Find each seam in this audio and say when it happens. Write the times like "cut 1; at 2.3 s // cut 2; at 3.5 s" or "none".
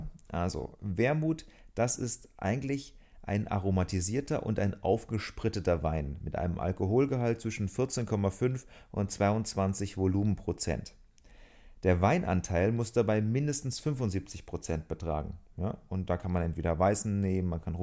none